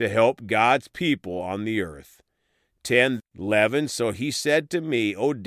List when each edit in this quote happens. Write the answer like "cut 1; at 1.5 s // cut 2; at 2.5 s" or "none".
cut 1; at 3.2 s